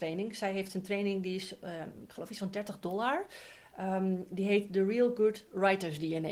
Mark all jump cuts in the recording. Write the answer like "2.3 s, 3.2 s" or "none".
none